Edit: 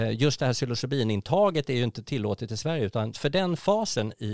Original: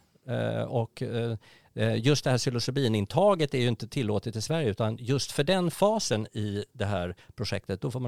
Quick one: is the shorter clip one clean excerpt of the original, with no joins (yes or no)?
no